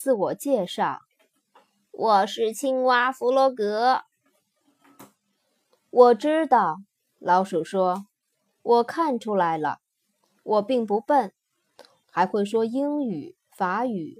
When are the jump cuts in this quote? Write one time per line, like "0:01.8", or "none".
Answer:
0:12.0